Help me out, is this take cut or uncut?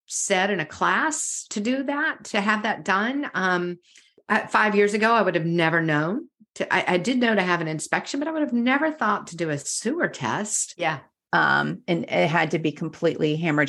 cut